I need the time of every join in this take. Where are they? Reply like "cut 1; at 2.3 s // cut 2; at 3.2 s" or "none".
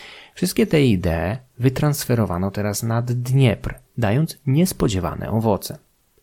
cut 1; at 3.8 s